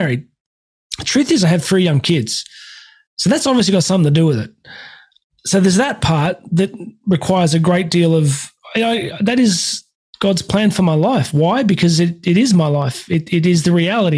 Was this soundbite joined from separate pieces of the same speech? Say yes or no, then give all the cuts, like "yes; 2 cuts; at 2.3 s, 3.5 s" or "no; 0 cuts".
no; 0 cuts